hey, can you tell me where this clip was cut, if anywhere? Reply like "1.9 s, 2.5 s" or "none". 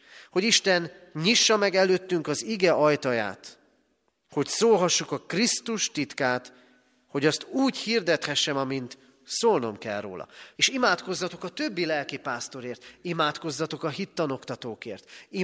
10.6 s